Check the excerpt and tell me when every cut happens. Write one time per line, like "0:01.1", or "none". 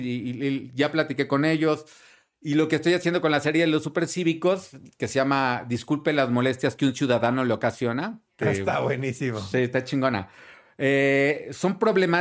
none